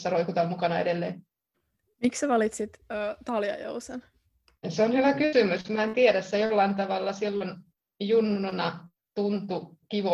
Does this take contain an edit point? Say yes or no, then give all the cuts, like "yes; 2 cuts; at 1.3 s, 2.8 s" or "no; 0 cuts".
no; 0 cuts